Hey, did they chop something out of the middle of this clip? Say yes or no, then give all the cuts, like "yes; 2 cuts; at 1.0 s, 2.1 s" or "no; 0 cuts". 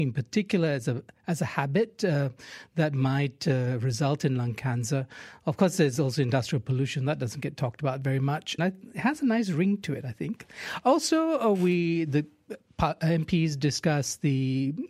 yes; 1 cut; at 8.6 s